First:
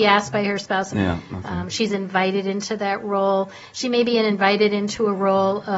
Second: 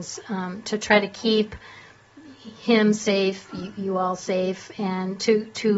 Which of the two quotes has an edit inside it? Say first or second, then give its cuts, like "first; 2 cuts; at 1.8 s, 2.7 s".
first; 1 cut; at 0.9 s